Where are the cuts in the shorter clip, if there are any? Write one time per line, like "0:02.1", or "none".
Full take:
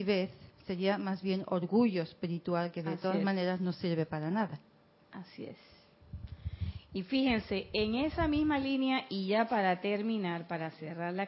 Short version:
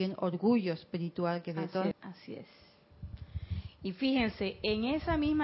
0:01.9